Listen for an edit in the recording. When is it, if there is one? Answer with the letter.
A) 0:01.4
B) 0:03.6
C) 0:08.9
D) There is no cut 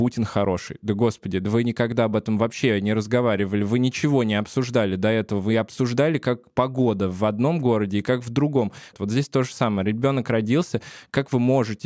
C